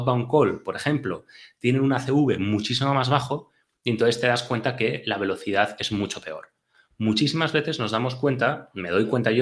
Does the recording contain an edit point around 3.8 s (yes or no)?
no